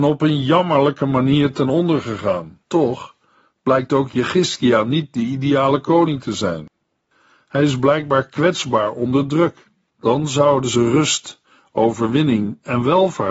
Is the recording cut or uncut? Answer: cut